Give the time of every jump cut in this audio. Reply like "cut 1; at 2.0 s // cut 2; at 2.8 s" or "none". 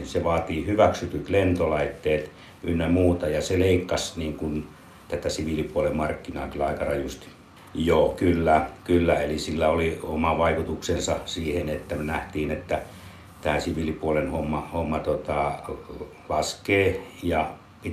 cut 1; at 7.6 s